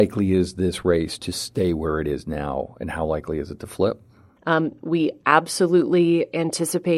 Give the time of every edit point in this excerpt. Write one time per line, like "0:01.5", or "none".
0:04.4